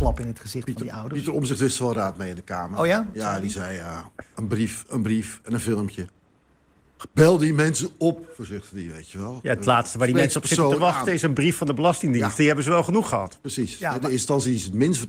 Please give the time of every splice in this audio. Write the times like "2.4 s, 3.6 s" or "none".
none